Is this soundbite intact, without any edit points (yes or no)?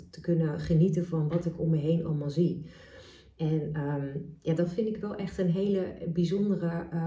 yes